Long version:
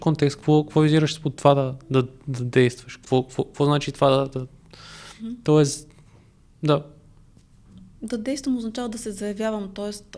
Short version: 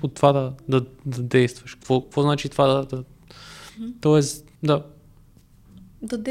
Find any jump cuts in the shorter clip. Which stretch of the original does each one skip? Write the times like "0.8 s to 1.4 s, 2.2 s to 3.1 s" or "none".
3.2 s to 3.5 s, 6.0 s to 6.6 s